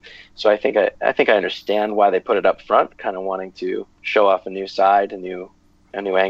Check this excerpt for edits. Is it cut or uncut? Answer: cut